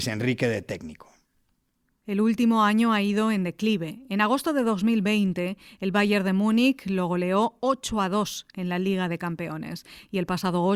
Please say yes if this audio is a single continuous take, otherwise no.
yes